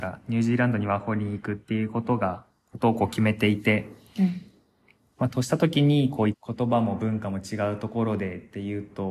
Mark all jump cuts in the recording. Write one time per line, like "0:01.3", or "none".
0:06.3